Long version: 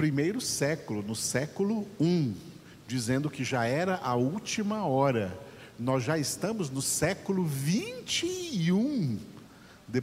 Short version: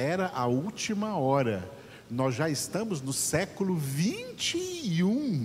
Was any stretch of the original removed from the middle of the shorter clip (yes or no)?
no